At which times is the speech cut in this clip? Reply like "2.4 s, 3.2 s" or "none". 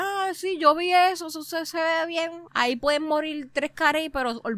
2.5 s